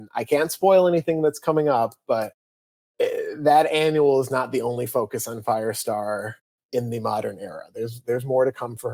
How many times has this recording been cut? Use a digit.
0